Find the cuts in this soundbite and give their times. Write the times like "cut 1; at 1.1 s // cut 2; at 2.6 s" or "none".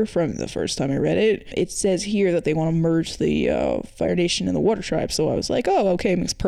none